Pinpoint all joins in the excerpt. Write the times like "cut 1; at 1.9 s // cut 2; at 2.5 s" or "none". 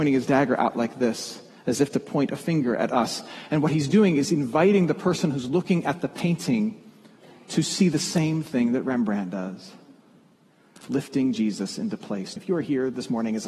cut 1; at 10.8 s // cut 2; at 12.4 s